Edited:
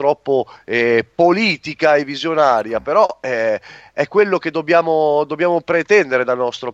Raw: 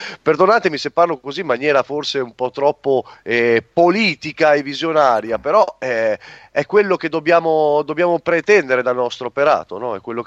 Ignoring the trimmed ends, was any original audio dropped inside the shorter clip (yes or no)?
no